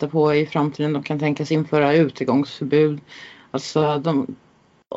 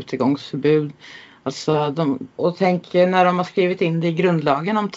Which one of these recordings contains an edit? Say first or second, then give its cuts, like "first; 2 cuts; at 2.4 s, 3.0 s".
second; 1 cut; at 2.4 s